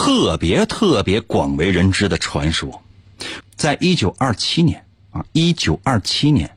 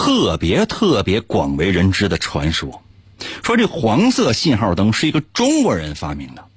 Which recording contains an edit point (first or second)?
first